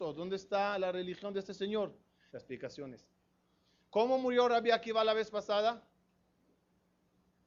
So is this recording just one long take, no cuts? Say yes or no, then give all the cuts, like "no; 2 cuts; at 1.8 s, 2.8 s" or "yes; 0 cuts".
no; 1 cut; at 2.3 s